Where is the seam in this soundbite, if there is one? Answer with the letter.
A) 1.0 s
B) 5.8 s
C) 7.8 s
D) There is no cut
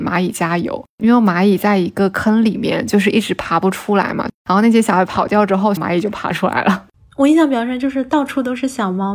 B